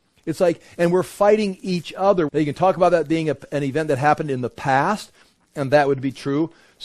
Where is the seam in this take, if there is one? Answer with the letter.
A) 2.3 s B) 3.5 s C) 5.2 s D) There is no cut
A